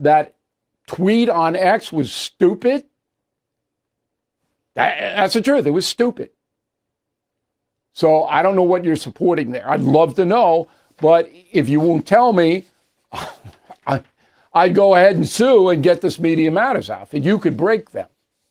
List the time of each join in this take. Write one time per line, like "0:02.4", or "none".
none